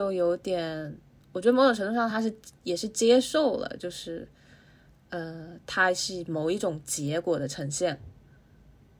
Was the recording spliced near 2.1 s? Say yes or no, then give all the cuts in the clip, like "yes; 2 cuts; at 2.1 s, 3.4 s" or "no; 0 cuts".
no; 0 cuts